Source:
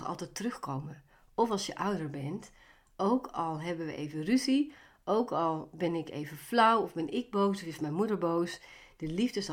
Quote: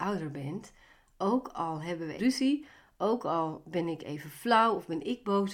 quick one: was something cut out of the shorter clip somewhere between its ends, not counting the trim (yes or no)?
yes